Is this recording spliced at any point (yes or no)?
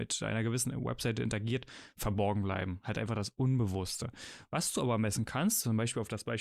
no